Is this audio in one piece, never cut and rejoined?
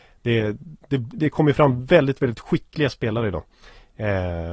no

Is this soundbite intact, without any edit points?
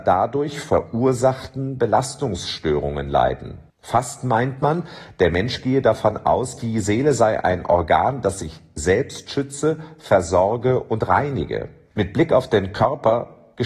no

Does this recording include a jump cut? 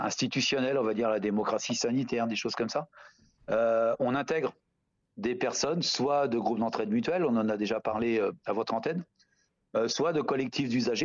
no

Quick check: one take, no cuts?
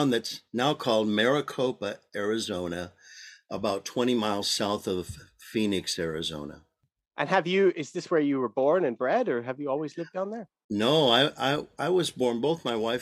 yes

